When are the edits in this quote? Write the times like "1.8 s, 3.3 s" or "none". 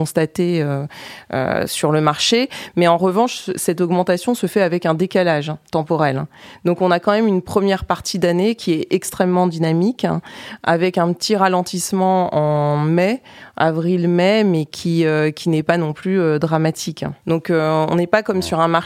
17.2 s